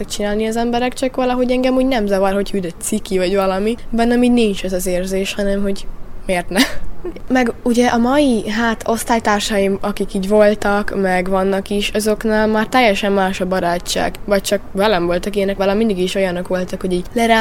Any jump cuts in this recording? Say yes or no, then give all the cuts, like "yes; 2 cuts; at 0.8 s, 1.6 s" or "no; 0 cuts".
yes; 1 cut; at 15.6 s